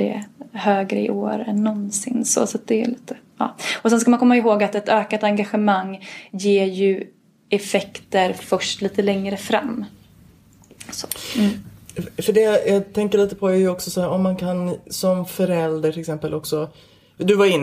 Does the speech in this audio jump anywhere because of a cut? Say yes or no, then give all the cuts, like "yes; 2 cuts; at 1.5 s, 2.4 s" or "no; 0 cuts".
no; 0 cuts